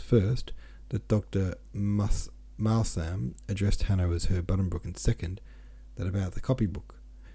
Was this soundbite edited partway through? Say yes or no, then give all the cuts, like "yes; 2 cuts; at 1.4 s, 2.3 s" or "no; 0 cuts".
no; 0 cuts